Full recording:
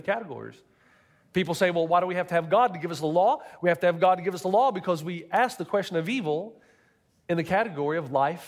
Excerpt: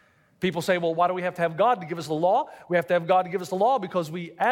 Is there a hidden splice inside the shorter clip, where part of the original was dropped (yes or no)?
no